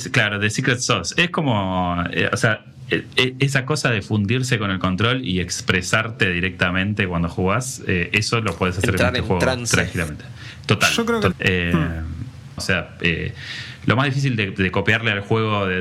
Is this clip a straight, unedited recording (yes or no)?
no